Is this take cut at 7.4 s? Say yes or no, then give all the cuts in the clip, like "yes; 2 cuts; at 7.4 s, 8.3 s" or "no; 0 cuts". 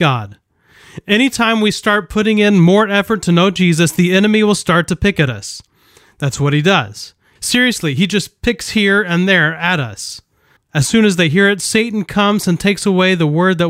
yes; 2 cuts; at 7.4 s, 10.6 s